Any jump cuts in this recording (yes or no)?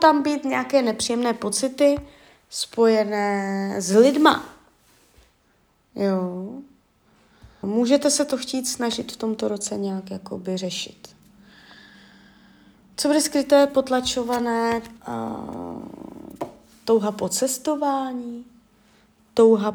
yes